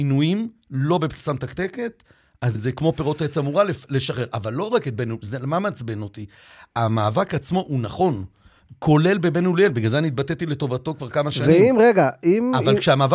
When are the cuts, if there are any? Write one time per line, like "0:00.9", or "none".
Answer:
0:02.5

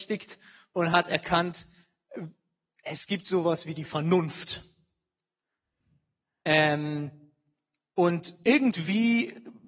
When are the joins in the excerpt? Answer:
none

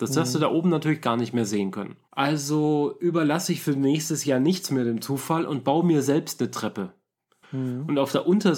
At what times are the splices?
0:02.1
0:07.4

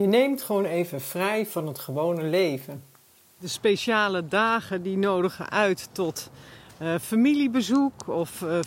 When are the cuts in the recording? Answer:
none

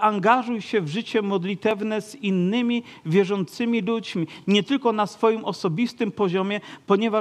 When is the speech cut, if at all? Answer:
none

